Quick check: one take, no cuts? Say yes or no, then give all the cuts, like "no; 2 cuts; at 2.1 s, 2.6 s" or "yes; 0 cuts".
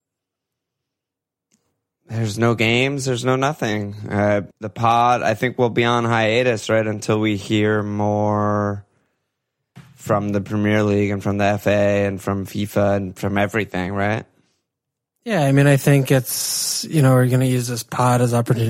no; 1 cut; at 4.5 s